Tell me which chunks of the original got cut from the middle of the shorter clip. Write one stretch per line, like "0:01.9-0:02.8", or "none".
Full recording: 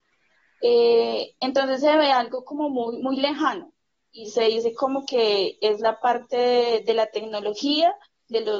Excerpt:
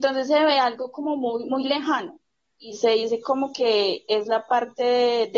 none